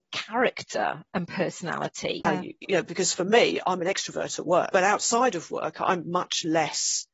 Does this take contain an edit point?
yes; 1 cut; at 2.2 s

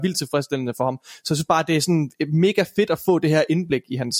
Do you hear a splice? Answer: no; 0 cuts

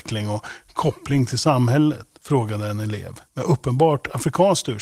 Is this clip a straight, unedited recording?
no; 2 cuts; at 2.1 s, 3.3 s

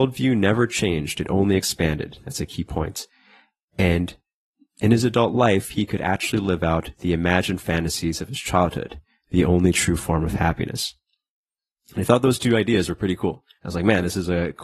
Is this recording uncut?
yes; 0 cuts

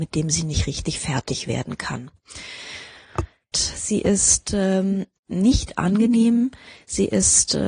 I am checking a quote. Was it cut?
yes; 1 cut; at 3.5 s

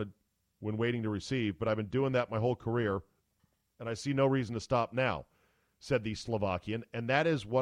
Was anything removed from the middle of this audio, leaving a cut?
no; 0 cuts

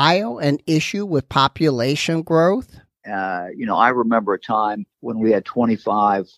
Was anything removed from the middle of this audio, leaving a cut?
yes; 2 cuts; at 3.0 s, 4.9 s

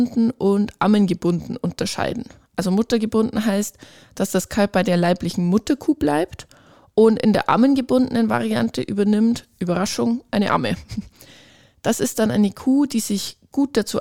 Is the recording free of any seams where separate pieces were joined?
yes; 0 cuts

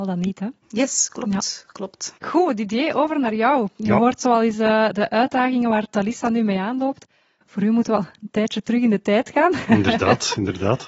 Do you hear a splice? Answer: no; 0 cuts

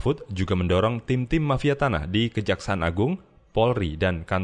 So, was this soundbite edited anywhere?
no; 0 cuts

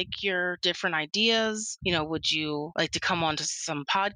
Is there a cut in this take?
no; 0 cuts

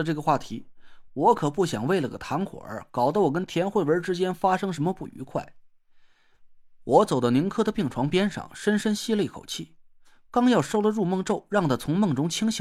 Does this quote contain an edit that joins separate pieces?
no; 0 cuts

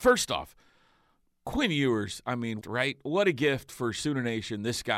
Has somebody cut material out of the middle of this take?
yes; 1 cut; at 2.6 s

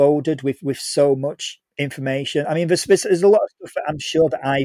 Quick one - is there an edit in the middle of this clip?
no; 0 cuts

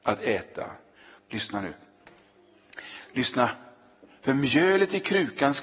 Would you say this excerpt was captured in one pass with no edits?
no; 2 cuts; at 1.2 s, 3.1 s

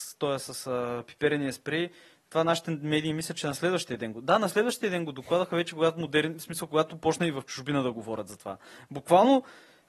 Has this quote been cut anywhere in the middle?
no; 0 cuts

